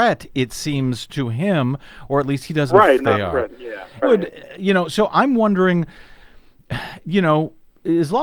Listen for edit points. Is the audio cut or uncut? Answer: cut